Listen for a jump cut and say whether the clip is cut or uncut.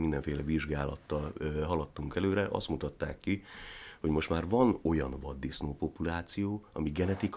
uncut